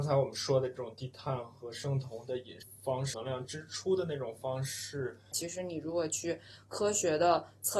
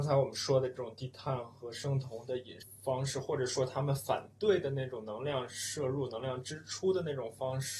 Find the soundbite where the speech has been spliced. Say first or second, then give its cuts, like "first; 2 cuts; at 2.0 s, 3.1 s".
first; 2 cuts; at 3.1 s, 5.3 s